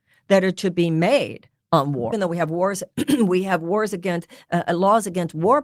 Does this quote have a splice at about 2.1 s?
yes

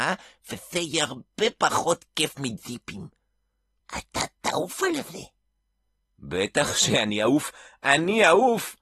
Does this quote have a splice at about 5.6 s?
no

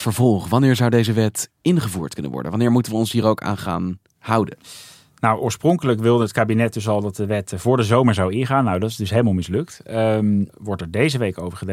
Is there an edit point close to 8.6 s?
no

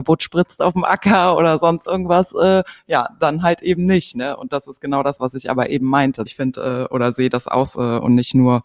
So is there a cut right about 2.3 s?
no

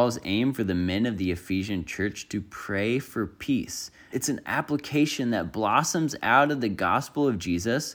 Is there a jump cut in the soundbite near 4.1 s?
yes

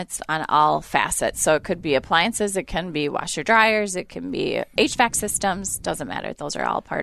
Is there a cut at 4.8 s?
yes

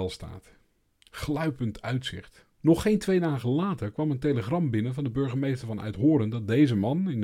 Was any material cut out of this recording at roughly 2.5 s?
yes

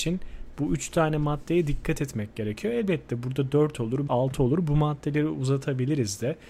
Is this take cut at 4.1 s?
yes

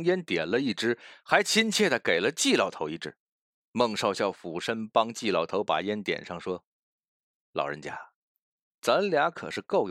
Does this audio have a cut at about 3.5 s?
no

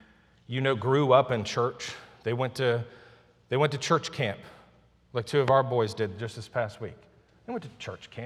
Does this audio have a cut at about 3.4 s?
no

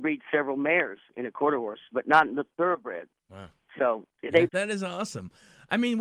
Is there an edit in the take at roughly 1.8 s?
no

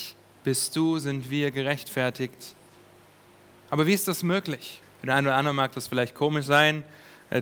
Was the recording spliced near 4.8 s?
yes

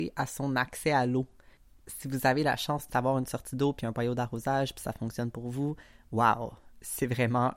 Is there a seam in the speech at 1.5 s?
no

